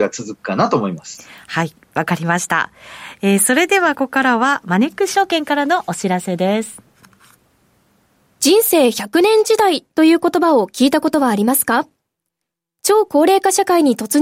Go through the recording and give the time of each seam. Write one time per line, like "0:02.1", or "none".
0:03.9

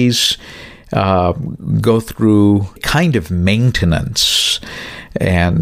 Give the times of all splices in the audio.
0:02.8

